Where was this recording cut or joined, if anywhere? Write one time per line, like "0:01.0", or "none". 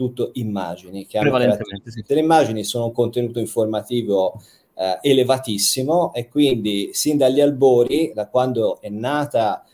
0:02.1

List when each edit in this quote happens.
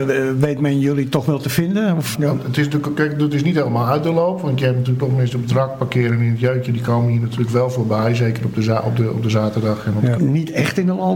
0:02.1
0:10.2

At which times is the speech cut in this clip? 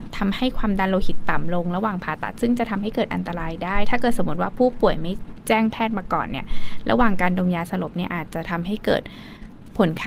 none

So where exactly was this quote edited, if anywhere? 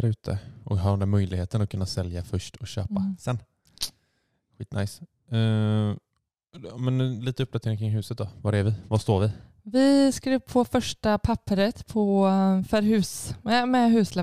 none

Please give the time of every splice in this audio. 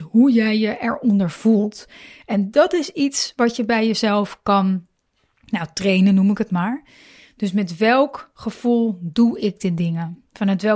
none

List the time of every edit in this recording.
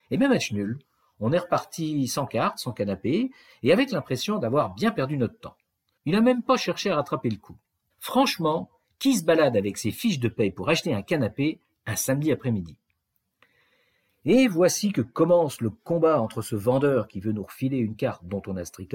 0:06.0
0:07.9

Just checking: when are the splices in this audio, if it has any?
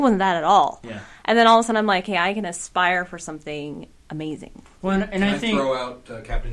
none

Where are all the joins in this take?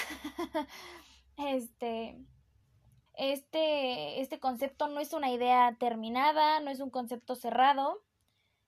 0:03.1

